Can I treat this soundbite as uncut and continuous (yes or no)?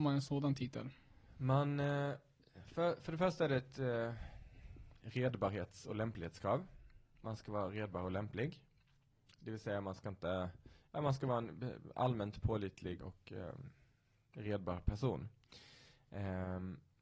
no